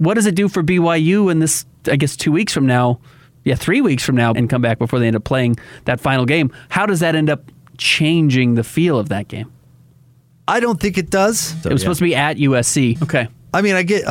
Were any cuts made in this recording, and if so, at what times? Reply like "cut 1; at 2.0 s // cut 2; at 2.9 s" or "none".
cut 1; at 4.3 s // cut 2; at 11.6 s // cut 3; at 12.9 s